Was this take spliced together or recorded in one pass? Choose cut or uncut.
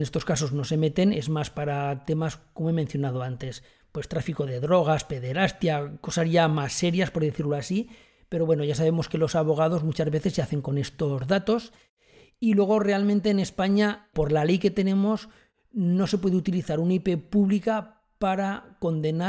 uncut